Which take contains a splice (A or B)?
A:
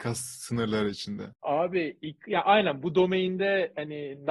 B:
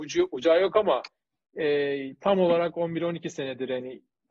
A